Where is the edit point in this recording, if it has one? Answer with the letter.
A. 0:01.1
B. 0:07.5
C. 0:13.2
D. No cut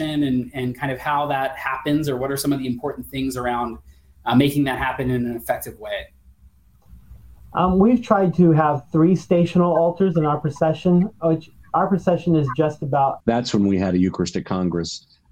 C